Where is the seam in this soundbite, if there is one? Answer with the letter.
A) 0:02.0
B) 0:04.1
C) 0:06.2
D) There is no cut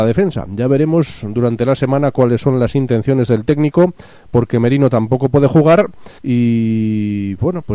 C